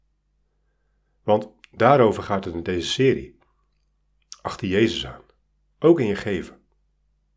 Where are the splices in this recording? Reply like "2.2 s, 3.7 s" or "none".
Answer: none